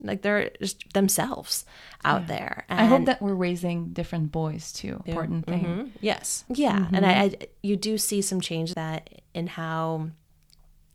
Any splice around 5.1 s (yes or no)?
yes